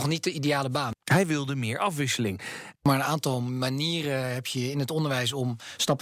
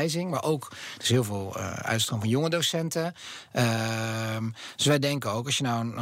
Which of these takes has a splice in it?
first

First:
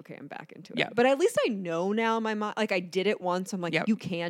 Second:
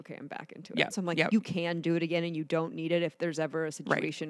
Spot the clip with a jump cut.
second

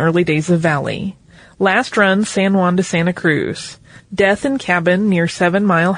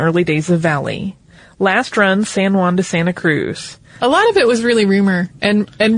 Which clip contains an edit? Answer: second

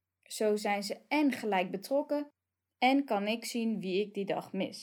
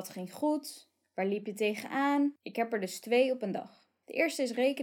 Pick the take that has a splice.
second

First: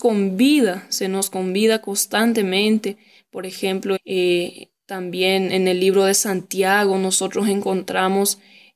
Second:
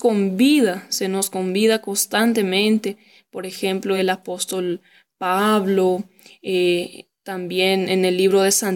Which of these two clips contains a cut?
first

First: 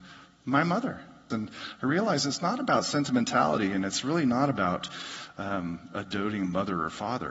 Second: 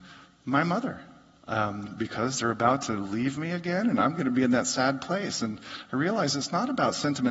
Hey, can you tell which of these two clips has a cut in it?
first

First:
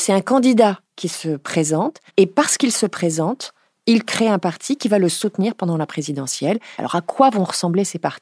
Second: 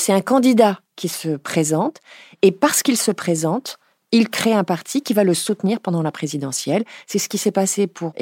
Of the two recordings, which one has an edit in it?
first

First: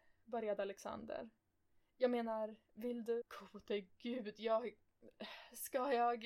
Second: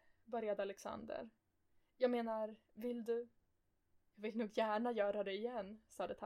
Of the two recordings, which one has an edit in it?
first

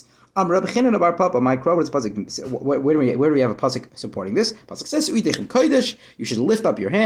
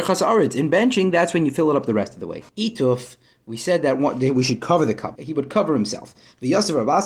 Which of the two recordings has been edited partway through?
second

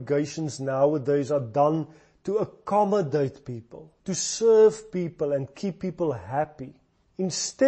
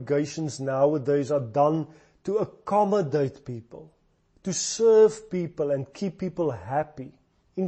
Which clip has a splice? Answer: first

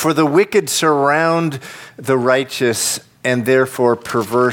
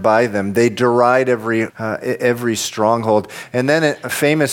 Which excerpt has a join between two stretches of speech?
second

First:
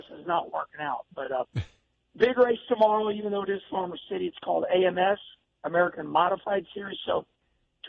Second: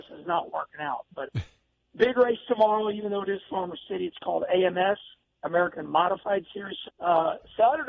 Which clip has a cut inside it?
second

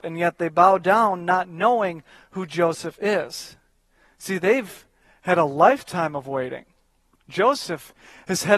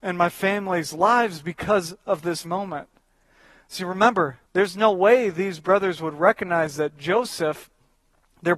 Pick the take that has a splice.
second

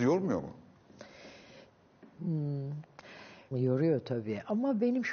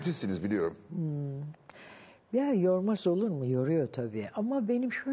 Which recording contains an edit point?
first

